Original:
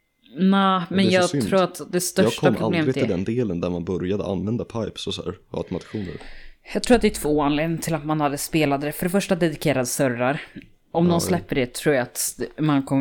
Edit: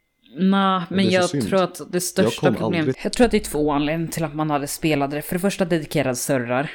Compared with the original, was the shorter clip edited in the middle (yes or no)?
yes